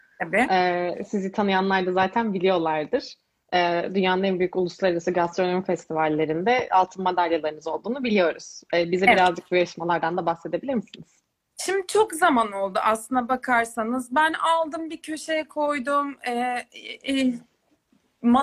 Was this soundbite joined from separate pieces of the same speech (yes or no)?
no